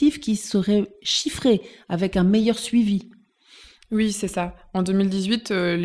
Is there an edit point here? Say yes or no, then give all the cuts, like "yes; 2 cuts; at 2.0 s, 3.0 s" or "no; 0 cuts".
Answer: no; 0 cuts